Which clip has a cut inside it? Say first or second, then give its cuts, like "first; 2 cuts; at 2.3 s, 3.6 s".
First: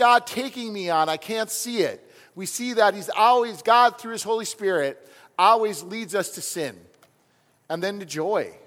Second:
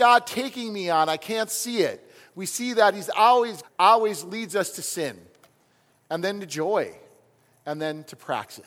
second; 1 cut; at 3.6 s